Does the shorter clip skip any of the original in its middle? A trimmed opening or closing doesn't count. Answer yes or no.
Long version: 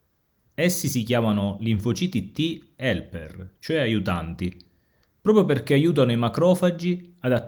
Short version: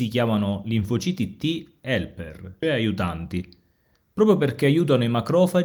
yes